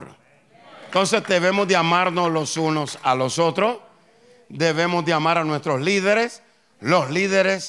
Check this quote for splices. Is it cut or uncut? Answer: uncut